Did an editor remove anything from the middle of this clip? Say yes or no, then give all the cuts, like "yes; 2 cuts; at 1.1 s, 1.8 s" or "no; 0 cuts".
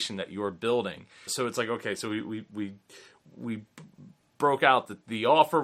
yes; 1 cut; at 1.3 s